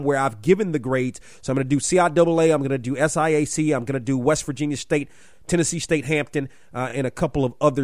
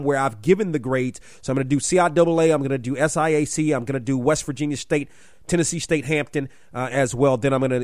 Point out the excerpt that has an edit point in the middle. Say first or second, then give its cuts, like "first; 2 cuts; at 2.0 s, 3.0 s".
second; 1 cut; at 6.9 s